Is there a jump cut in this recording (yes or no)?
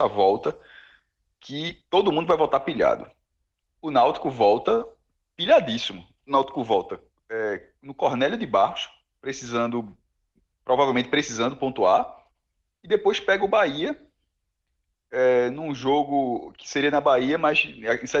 no